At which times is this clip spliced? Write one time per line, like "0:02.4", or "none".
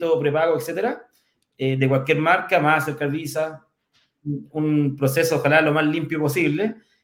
0:04.2